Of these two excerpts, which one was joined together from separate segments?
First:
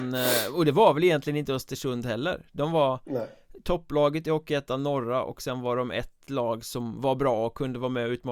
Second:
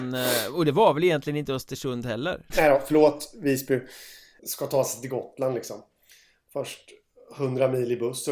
second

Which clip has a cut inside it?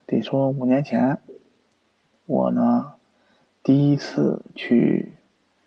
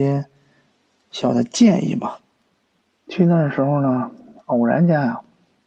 second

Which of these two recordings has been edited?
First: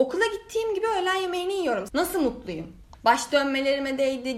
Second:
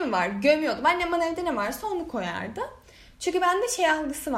first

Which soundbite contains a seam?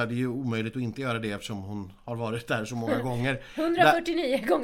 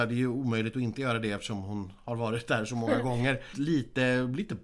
second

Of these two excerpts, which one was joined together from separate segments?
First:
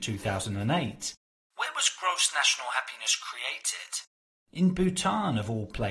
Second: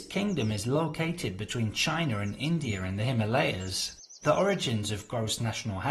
first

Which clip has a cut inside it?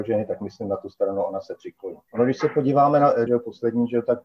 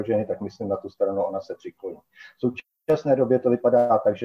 first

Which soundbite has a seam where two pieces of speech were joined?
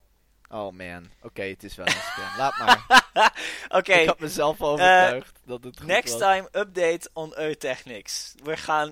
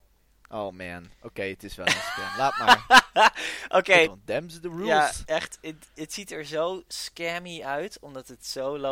second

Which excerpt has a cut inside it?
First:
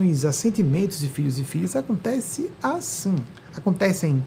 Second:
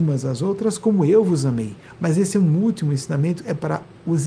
second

